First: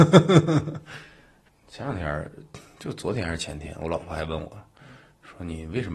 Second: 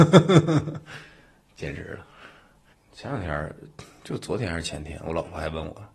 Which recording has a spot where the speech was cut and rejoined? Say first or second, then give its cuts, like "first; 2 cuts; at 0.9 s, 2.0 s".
first; 1 cut; at 1.5 s